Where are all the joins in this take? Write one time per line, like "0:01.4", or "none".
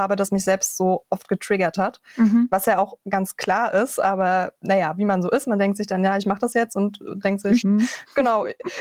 0:07.6